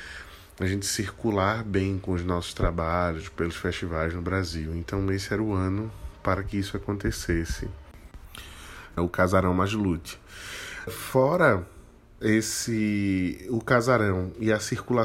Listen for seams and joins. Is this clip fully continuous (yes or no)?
no